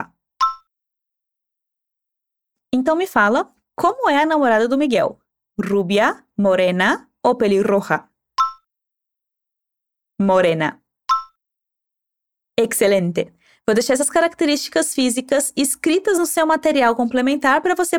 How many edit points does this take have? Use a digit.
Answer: 0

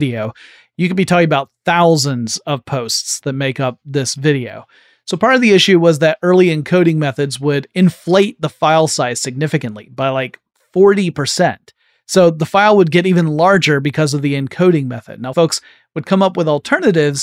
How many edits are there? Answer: 1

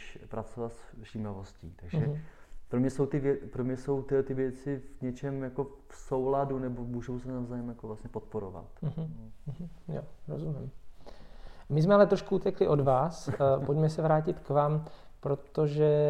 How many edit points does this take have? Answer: 0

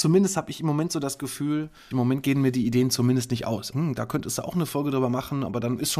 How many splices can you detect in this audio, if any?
2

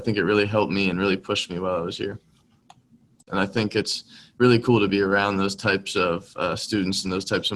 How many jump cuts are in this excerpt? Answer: 1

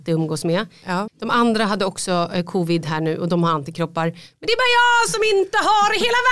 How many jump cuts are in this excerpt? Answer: 1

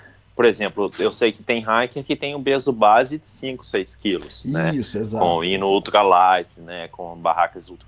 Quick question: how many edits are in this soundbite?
0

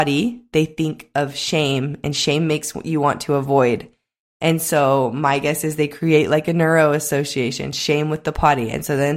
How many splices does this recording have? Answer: 0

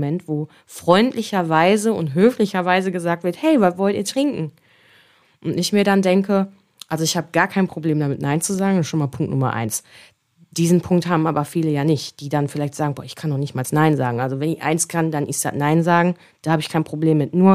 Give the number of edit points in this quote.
0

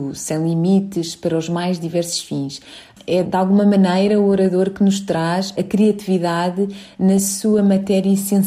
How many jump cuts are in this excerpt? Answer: 2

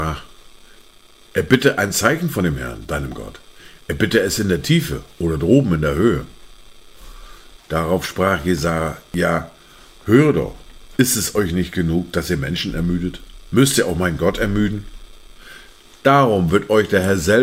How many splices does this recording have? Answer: 2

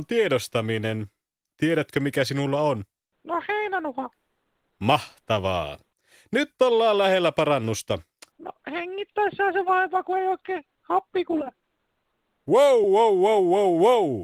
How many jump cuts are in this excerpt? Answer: 2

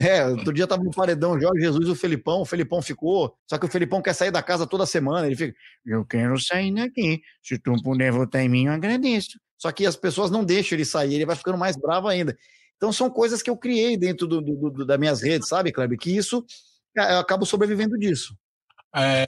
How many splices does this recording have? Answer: 1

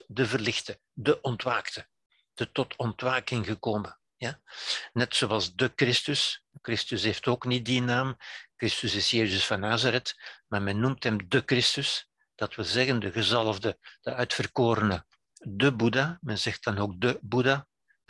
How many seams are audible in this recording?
1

